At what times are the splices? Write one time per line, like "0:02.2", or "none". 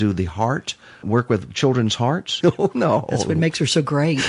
0:01.0
0:02.4